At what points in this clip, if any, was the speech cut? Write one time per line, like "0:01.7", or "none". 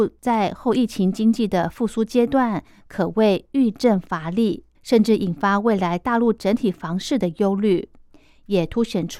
0:04.7